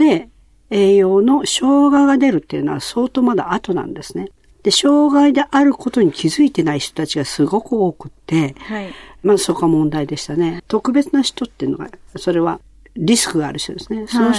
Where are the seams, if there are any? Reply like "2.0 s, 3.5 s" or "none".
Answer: 10.6 s